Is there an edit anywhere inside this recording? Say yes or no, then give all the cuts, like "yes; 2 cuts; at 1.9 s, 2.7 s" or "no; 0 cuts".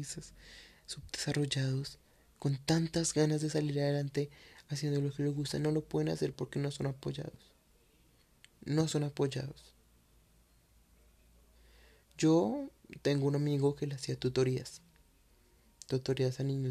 no; 0 cuts